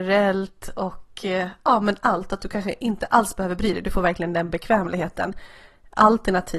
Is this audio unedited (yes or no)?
yes